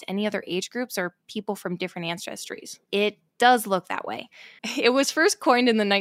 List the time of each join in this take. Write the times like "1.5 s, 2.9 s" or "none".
2.9 s, 4.6 s